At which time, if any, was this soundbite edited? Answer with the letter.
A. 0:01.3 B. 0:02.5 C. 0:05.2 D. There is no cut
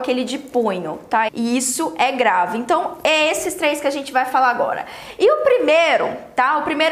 A